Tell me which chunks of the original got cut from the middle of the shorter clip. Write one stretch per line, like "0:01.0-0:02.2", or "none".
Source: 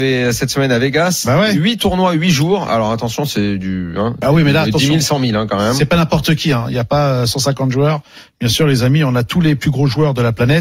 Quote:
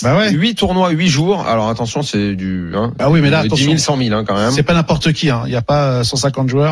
none

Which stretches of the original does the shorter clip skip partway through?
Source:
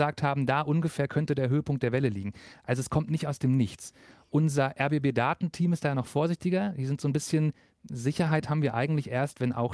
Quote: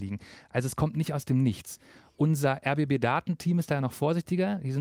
none

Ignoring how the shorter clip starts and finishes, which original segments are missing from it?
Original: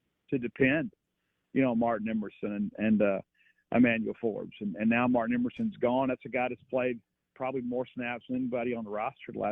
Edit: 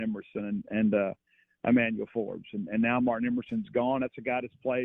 none

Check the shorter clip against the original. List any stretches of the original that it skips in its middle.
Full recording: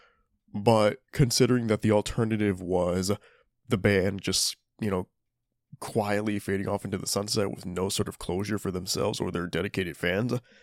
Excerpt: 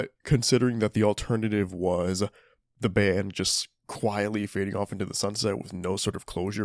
0:04.7-0:05.8

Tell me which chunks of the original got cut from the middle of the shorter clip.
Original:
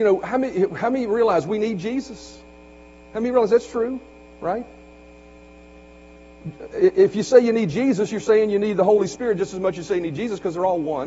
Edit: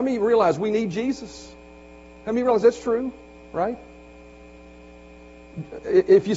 none

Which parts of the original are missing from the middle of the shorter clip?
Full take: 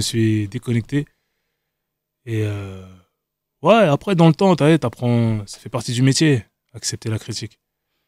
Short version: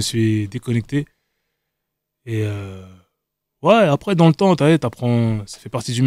none

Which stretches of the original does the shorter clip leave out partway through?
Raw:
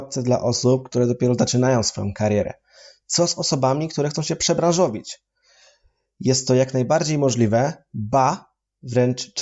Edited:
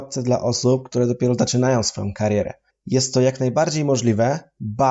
0:02.7-0:06.0

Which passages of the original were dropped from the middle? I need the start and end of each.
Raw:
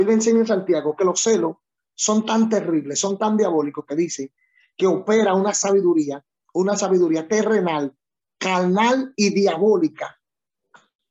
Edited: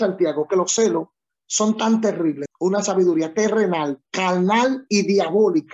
0:02.9-0:06.4
0:08.0-0:08.3

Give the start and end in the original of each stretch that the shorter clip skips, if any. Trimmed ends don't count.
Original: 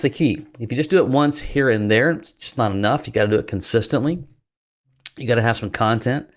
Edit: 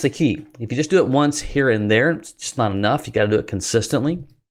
none

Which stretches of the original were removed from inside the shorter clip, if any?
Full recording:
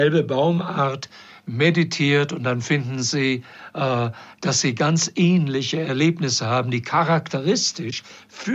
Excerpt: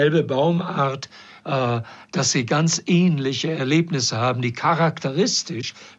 0:01.4-0:03.7

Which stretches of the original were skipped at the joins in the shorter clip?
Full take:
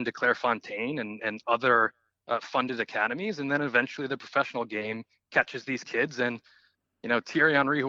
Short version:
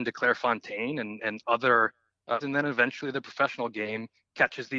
0:02.4-0:03.4

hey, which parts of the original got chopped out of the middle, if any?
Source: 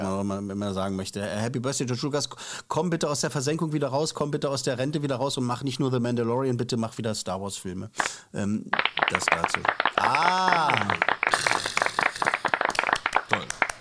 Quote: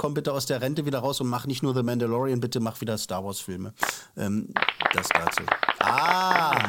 none

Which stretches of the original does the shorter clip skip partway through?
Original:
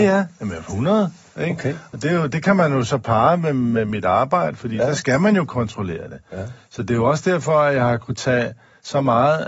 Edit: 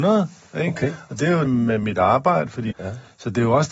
0:02.3-0:03.5
0:04.8-0:06.2

